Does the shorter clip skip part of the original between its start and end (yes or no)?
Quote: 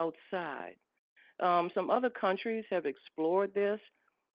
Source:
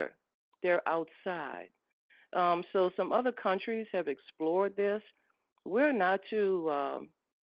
yes